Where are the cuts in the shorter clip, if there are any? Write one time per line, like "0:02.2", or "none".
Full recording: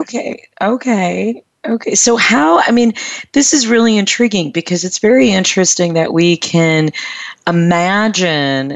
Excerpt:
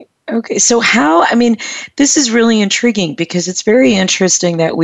none